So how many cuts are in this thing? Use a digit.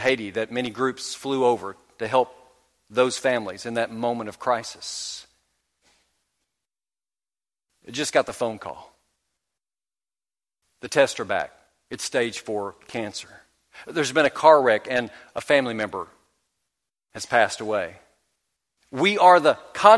1